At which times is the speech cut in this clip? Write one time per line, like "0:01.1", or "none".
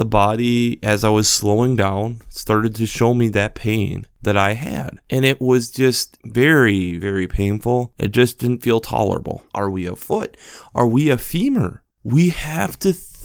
0:07.0
0:09.5
0:11.9